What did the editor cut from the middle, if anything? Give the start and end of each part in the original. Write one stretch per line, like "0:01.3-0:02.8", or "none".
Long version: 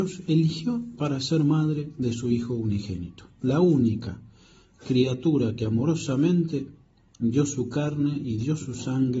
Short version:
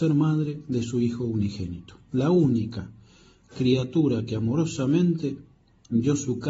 none